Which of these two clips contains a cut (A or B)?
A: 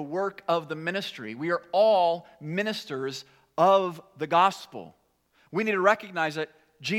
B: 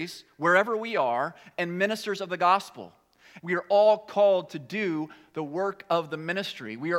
B